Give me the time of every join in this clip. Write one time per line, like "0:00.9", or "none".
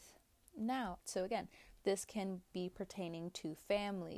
0:01.0